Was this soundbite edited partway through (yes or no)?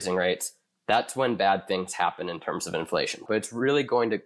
yes